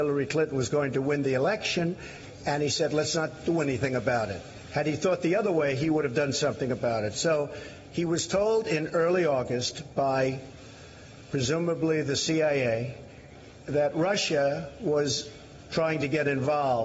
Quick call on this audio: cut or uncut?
uncut